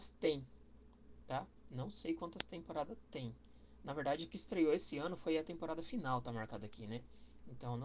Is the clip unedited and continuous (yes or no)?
yes